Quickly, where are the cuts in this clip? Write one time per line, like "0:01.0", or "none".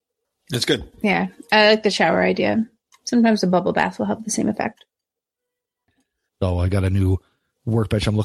0:00.9
0:06.3